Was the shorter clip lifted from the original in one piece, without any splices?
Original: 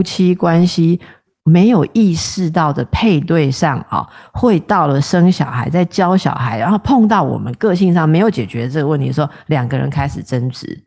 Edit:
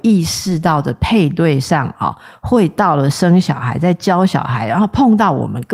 yes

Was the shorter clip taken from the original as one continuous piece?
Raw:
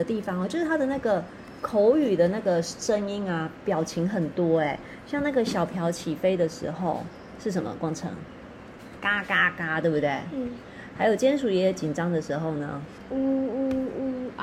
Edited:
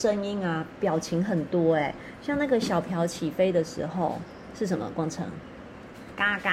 yes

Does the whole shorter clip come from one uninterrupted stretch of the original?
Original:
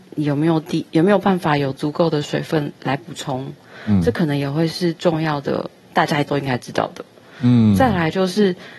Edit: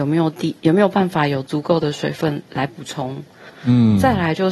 no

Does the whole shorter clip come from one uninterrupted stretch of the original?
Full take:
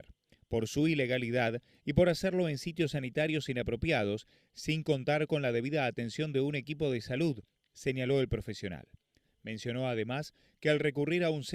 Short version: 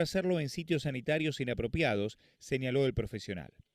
no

